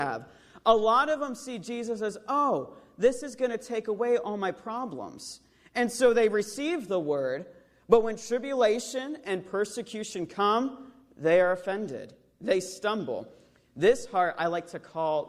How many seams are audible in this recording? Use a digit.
0